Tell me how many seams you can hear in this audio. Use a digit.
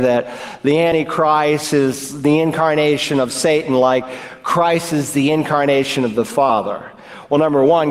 0